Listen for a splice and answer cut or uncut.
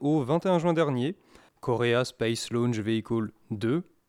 cut